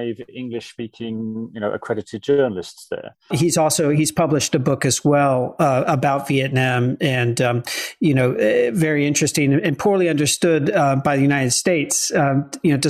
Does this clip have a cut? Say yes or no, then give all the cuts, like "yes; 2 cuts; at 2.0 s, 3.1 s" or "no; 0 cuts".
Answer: yes; 1 cut; at 3.3 s